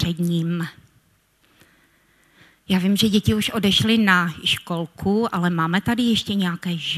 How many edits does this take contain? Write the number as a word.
zero